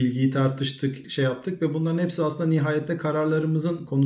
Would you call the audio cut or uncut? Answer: cut